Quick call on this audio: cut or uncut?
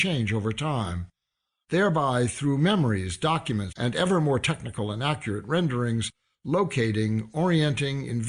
cut